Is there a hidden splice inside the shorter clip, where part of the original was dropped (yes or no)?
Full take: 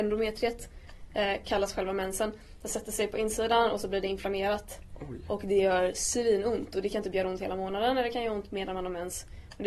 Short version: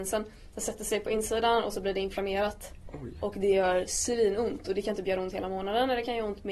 no